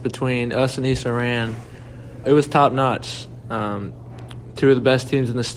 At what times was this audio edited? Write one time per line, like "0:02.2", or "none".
0:02.2

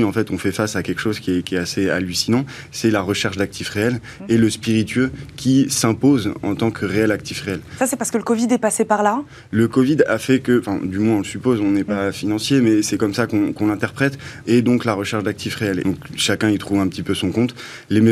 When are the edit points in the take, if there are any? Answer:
0:14.4
0:15.8

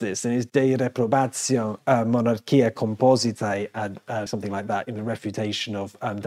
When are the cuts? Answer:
0:04.3

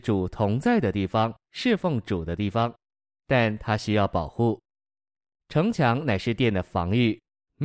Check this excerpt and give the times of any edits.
0:01.5

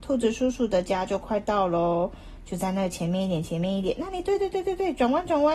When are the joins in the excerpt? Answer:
none

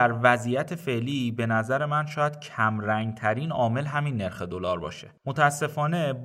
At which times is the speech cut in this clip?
0:05.2

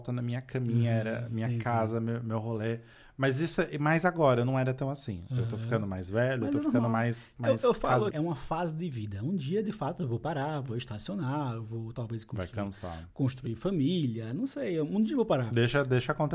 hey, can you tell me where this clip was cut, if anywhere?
0:08.1

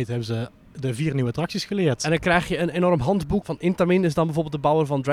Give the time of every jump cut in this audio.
0:03.4

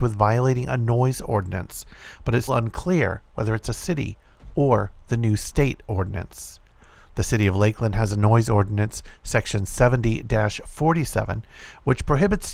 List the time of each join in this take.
0:02.5

